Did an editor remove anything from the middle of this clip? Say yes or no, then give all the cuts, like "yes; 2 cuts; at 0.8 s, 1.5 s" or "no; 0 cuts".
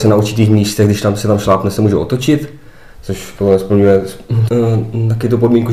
yes; 2 cuts; at 2.9 s, 4.5 s